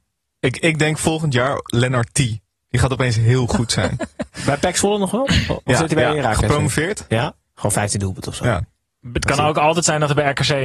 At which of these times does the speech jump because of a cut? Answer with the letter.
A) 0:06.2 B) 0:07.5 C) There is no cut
B